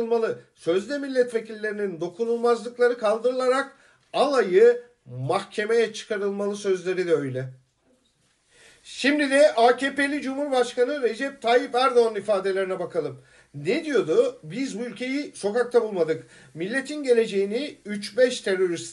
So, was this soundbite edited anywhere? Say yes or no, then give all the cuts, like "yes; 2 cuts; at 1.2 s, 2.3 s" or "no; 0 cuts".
no; 0 cuts